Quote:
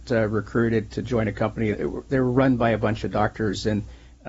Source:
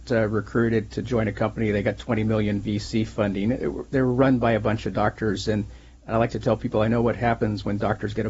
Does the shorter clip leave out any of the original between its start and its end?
yes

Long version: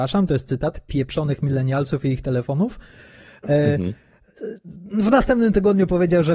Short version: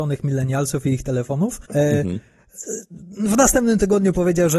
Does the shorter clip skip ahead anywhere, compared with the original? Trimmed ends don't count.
yes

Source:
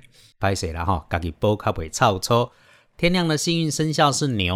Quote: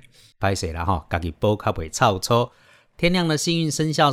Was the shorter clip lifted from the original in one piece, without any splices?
yes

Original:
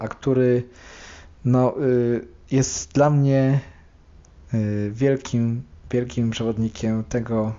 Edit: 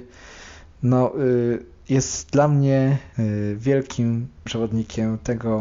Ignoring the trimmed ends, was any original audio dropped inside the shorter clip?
yes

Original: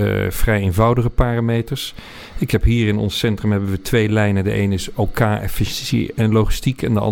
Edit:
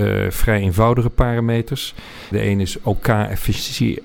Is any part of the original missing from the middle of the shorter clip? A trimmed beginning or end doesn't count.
yes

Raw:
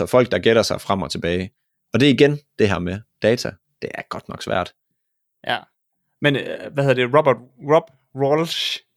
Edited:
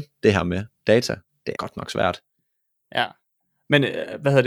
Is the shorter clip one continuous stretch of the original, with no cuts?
no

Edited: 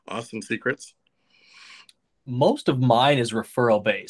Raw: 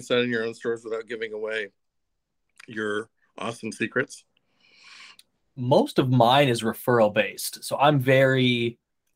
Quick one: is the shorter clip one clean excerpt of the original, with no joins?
yes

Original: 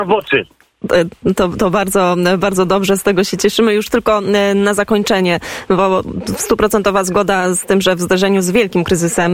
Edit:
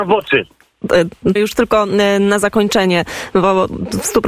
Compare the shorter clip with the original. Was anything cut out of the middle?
yes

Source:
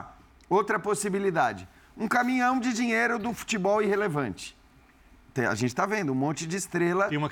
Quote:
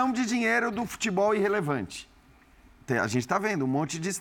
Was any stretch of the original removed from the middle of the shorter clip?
no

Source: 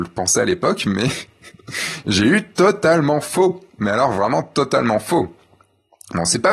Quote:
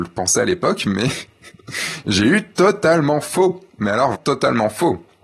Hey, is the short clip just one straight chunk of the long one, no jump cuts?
no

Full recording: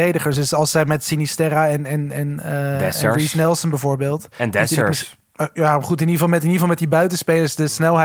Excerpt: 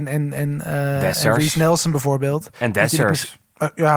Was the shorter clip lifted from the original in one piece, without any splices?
yes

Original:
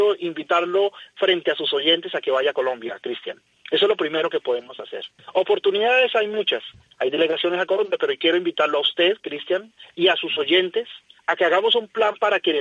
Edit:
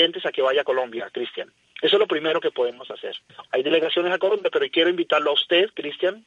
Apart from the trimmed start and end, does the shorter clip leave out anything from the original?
yes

